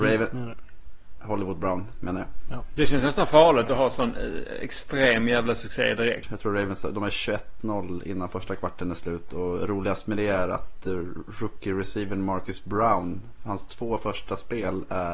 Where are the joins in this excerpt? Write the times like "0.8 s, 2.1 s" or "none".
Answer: 6.2 s